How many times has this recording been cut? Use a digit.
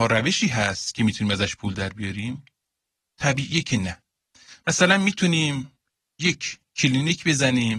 0